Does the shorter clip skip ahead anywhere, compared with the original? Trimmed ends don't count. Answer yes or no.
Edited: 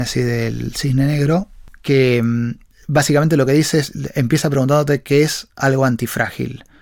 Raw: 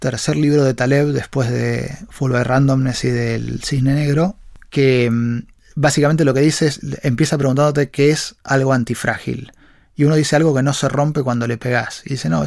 no